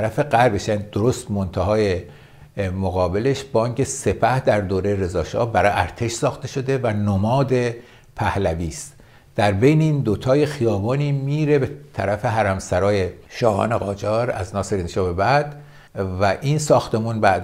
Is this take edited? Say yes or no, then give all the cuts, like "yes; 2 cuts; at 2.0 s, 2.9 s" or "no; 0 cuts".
yes; 2 cuts; at 13.3 s, 15.9 s